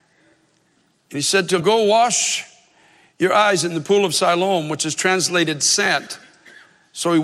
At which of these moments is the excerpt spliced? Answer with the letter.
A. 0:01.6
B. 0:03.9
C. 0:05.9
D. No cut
A